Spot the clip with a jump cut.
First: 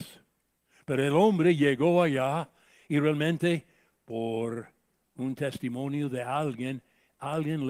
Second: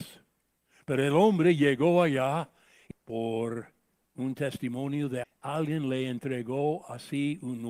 second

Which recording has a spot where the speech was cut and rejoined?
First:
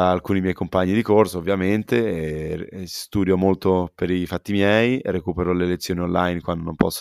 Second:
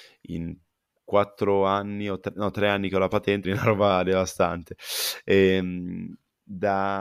second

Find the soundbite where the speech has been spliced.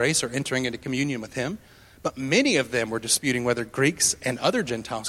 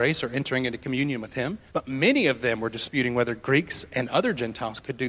second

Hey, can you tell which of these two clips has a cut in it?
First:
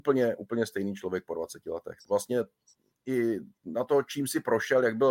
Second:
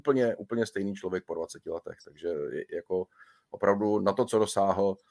first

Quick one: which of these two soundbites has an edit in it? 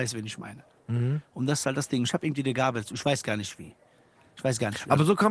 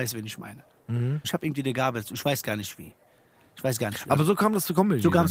second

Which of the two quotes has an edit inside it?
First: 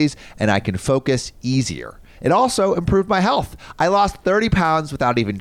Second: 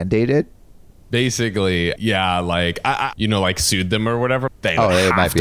second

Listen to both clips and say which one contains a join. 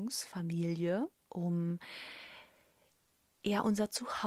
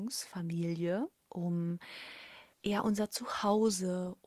second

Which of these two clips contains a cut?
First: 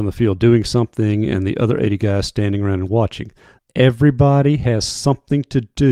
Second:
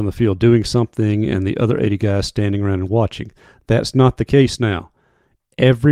first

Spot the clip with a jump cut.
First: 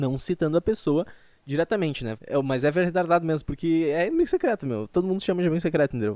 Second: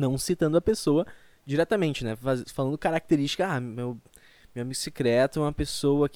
first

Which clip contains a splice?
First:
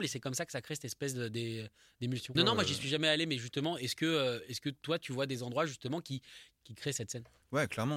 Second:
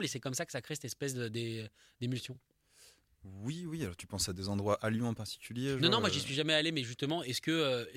first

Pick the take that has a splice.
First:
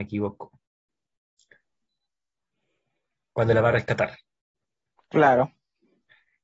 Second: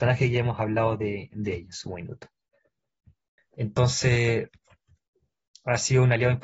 second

